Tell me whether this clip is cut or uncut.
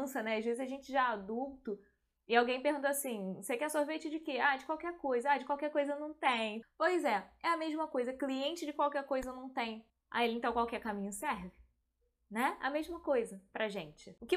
cut